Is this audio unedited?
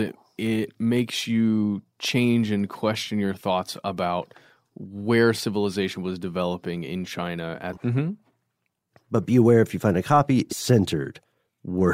no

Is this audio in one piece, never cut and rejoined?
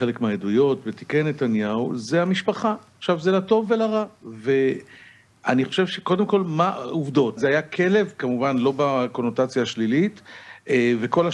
no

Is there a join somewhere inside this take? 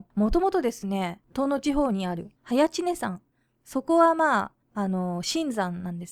no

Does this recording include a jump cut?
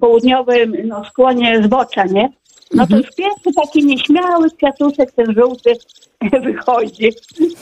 no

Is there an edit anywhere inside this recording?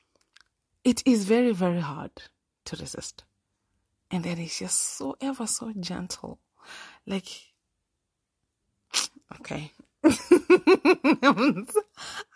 no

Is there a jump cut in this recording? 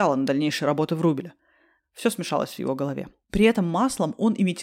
yes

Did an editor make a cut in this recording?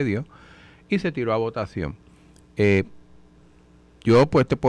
no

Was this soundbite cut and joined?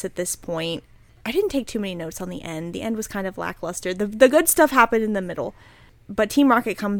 no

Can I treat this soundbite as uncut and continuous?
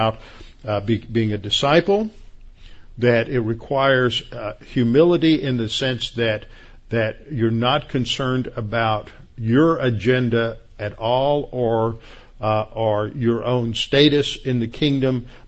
yes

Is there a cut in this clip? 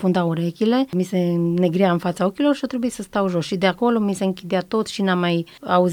no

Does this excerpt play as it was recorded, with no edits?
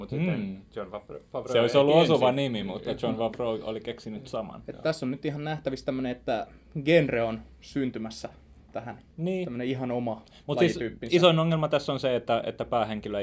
yes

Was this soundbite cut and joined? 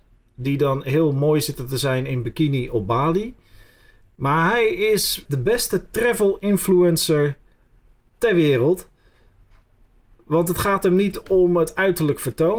yes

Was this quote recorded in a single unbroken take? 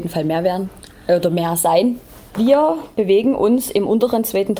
yes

